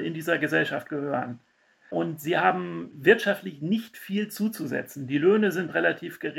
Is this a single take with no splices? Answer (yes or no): yes